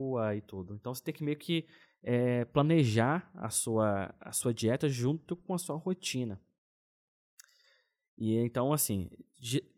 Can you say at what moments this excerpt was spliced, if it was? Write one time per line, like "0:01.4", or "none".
none

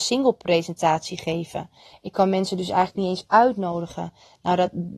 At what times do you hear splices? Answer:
none

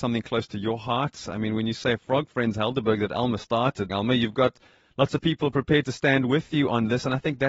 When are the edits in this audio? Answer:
0:03.9

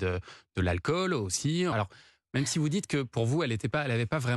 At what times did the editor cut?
0:01.7

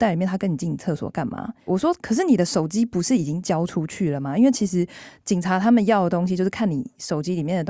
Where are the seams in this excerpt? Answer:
0:01.7

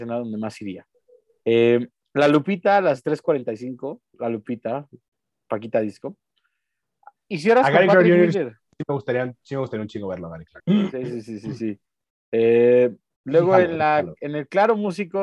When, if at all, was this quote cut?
0:07.2
0:10.6

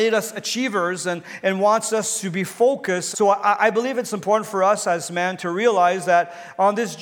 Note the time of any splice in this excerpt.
0:03.1

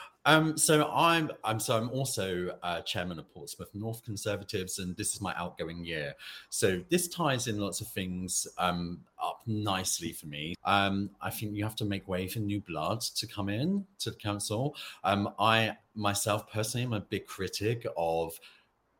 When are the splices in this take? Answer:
0:10.5

